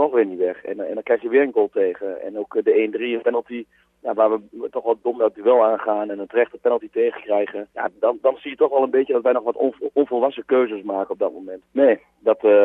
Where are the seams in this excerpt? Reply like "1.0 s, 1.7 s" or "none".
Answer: 7.7 s, 11.6 s

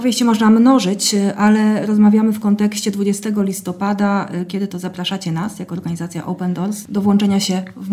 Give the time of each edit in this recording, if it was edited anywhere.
none

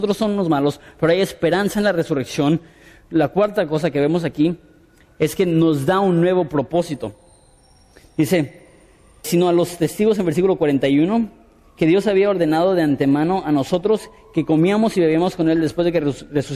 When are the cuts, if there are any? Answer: 9.2 s

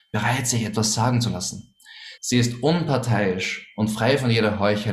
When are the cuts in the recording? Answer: 2.2 s

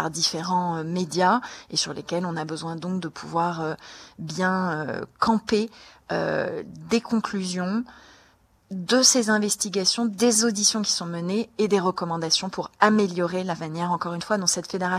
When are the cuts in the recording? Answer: none

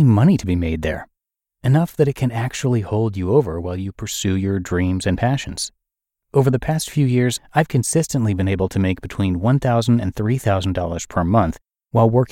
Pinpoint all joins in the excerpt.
none

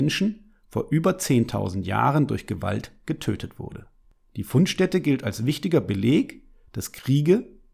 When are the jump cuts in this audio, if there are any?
none

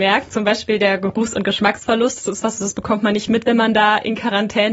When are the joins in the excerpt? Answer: 3.3 s

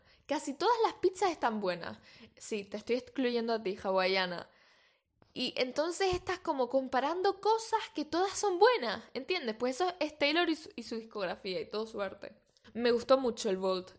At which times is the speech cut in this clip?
12.6 s

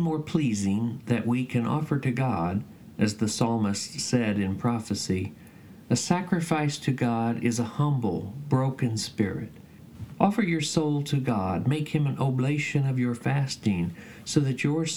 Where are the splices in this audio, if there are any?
10.1 s

